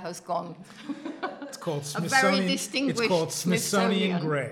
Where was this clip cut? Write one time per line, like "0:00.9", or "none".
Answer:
none